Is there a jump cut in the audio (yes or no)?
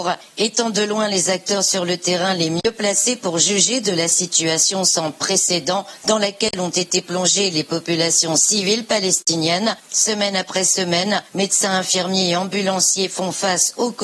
no